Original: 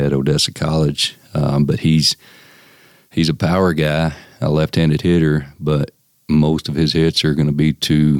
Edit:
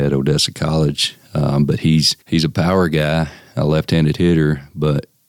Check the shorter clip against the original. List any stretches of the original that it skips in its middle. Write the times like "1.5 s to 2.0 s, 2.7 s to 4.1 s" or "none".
2.2 s to 3.1 s